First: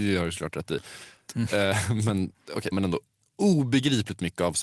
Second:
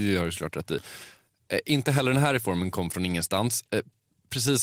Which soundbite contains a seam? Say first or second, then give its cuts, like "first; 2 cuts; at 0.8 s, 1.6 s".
first; 2 cuts; at 1.3 s, 2.7 s